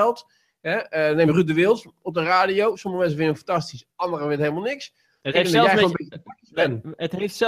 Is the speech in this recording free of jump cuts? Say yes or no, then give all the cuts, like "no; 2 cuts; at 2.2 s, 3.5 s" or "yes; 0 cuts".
no; 1 cut; at 5.2 s